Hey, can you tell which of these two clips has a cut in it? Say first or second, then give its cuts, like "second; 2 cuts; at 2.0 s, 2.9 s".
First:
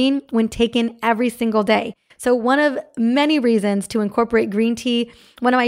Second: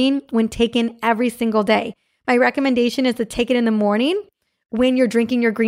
first; 1 cut; at 2.1 s